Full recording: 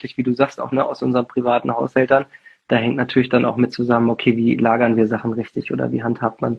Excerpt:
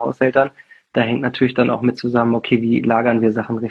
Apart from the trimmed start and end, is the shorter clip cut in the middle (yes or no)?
no